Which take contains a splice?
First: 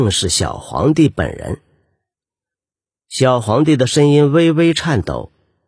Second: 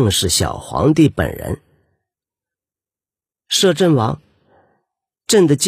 first; 1 cut; at 3.0 s

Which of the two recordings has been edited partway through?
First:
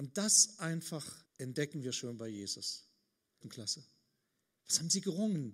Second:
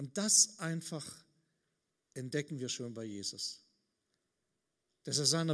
first; 2 cuts; at 1.3 s, 3.4 s

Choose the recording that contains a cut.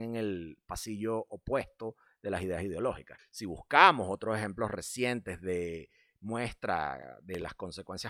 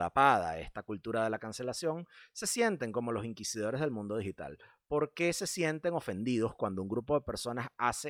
first; 1 cut; at 3.2 s

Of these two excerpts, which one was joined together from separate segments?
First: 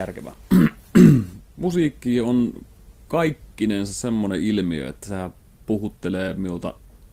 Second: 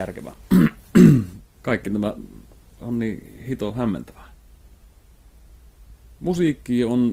first; 1 cut; at 1.5 s

